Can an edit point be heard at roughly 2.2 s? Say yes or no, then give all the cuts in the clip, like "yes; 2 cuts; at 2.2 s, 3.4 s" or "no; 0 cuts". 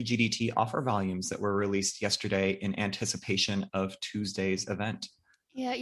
no; 0 cuts